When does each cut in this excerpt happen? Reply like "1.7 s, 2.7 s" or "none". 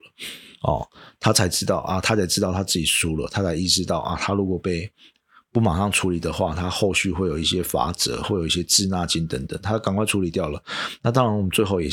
none

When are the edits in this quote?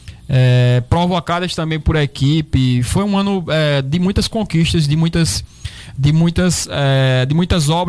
none

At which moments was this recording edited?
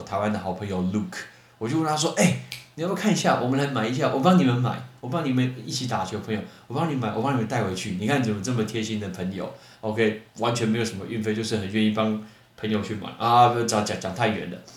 none

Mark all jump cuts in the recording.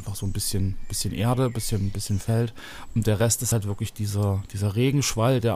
none

